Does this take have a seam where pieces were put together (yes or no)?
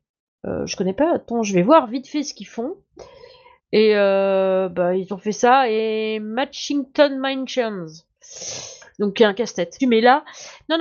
yes